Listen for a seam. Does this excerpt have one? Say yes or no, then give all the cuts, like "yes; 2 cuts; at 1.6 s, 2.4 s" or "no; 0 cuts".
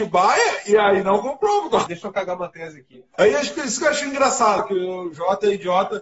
yes; 3 cuts; at 1.9 s, 3.1 s, 4.6 s